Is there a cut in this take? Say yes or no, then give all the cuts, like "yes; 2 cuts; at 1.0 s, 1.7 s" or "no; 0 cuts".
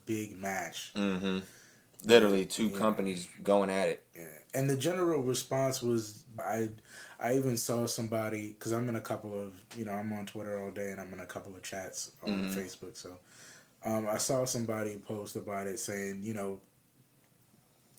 yes; 1 cut; at 6.4 s